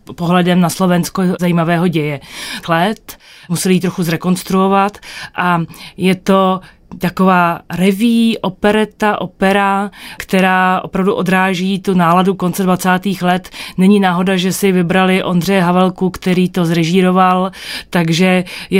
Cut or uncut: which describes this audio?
cut